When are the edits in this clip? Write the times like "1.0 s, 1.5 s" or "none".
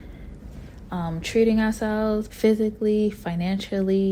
2.3 s